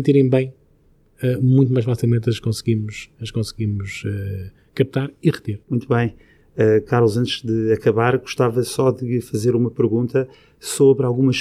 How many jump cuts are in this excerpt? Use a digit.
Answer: 1